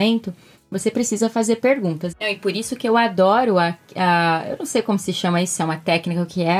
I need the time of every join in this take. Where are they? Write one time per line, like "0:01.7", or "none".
0:02.1

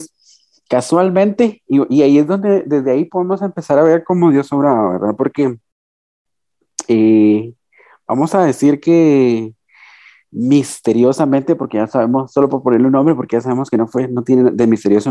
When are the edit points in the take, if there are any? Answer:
none

